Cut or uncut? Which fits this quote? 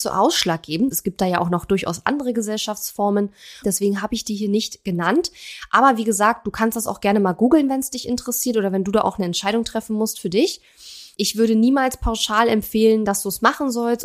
cut